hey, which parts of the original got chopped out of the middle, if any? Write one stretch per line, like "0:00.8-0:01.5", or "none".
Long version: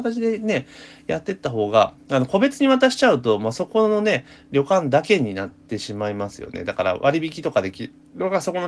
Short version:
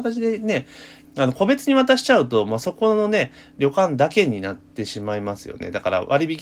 0:01.0-0:02.0